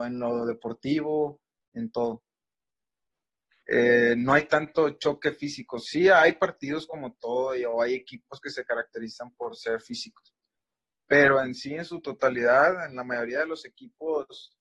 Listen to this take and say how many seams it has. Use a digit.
1